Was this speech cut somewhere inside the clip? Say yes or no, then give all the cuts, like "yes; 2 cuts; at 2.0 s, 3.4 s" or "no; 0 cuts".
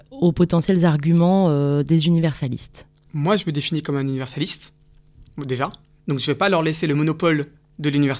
yes; 1 cut; at 3.1 s